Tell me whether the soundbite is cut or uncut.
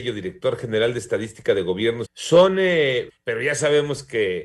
cut